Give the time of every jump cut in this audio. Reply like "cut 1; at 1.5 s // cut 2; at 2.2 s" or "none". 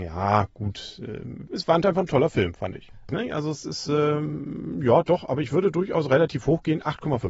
cut 1; at 3.1 s